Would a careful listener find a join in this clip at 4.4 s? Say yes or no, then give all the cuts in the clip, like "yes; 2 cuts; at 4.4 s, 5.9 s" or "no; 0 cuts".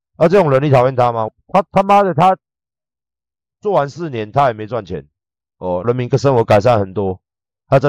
no; 2 cuts; at 1.3 s, 5.8 s